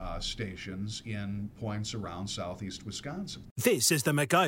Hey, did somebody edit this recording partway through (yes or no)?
yes